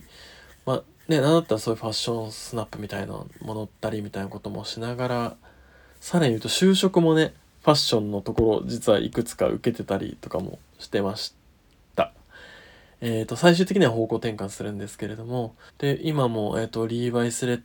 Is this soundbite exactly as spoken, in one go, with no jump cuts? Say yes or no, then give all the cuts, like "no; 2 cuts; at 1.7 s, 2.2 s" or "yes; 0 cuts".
no; 1 cut; at 15.7 s